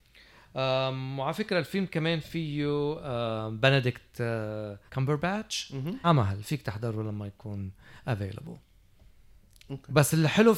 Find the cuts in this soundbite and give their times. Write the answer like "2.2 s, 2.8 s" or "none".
4.9 s, 6.0 s